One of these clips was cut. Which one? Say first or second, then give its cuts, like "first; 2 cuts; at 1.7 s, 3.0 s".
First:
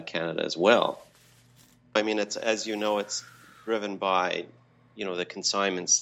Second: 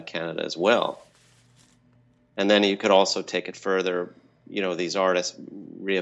first; 1 cut; at 2.0 s